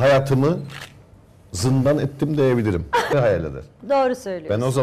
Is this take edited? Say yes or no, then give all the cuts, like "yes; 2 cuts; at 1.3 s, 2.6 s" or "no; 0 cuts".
yes; 1 cut; at 3.1 s